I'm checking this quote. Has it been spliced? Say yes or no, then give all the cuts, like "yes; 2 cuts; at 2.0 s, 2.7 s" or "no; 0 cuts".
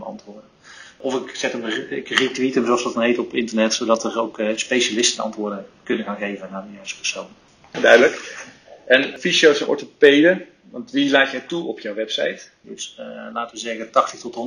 yes; 2 cuts; at 7.7 s, 12.6 s